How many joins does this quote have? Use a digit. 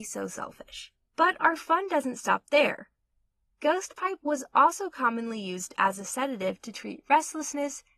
1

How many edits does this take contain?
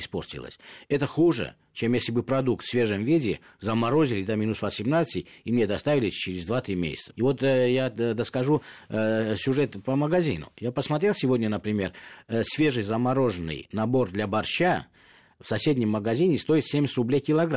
1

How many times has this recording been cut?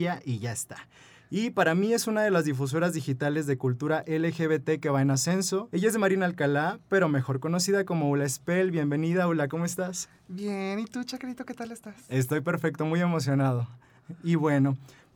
1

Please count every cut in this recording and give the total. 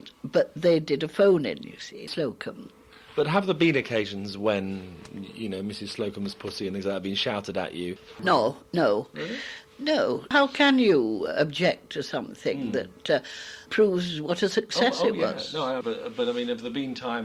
3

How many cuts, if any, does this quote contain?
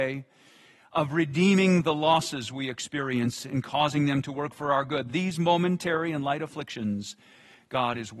0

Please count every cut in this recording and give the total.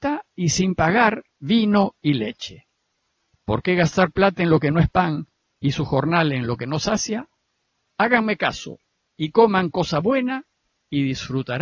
1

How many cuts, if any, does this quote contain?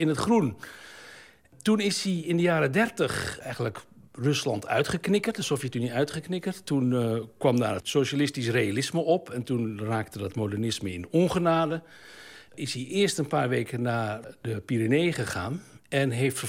1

